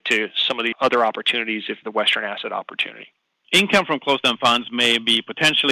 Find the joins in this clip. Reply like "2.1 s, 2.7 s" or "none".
1.8 s, 3.4 s